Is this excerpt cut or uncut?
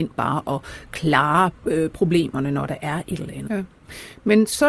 cut